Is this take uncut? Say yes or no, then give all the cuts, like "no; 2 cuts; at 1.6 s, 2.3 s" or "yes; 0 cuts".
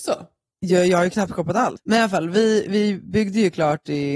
no; 1 cut; at 1.8 s